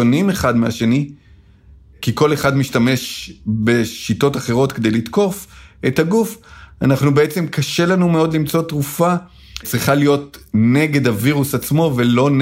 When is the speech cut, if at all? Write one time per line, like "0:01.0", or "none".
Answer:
0:09.6